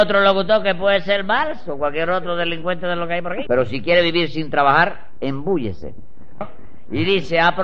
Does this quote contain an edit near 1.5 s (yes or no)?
no